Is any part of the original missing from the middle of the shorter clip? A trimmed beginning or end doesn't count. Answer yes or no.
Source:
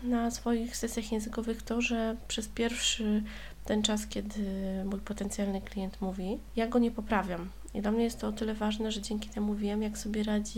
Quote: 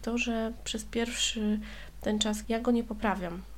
yes